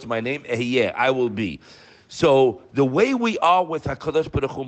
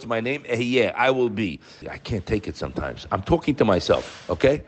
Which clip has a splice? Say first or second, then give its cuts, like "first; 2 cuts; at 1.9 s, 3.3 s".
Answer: second; 1 cut; at 1.8 s